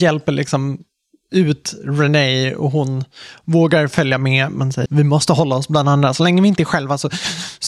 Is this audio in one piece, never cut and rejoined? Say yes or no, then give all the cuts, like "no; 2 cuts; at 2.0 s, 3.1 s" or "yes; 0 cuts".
no; 1 cut; at 4.9 s